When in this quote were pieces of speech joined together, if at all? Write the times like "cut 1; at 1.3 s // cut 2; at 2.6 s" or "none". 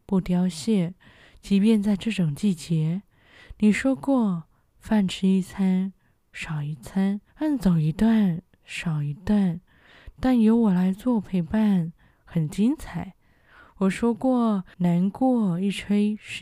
cut 1; at 7.3 s // cut 2; at 14.7 s